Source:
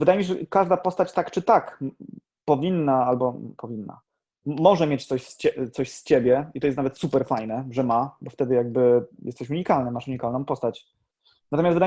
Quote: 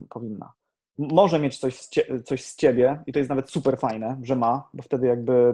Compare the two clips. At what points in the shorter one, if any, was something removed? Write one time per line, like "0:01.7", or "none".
none